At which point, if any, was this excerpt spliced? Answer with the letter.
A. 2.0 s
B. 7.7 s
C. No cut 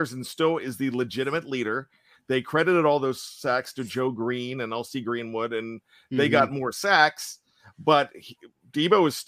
C